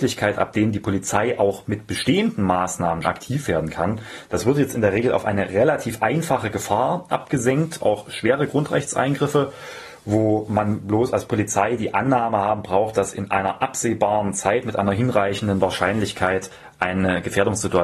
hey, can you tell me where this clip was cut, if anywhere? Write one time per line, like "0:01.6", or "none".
0:03.0